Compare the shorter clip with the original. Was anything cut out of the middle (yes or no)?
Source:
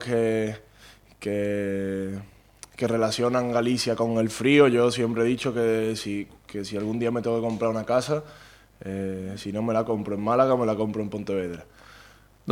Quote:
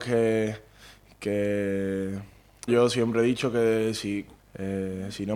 yes